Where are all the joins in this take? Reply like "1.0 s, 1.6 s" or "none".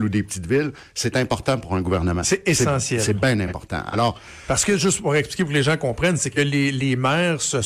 none